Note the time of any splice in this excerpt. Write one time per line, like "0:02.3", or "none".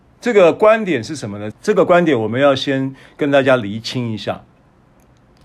0:01.5